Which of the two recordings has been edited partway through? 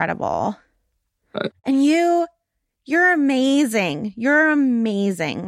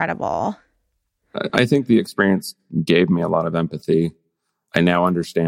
first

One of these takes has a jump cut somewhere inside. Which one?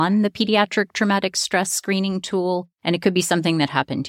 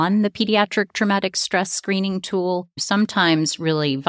first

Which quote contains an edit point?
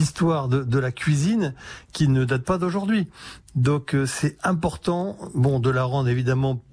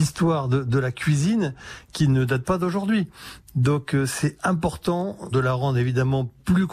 second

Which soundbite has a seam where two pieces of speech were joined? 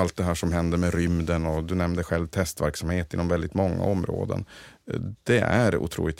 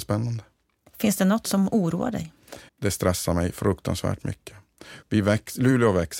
second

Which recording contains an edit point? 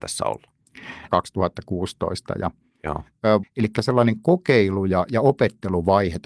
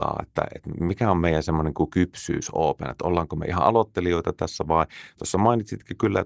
first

